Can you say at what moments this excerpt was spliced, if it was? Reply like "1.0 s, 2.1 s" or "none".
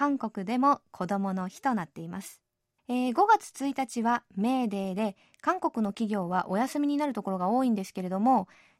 2.8 s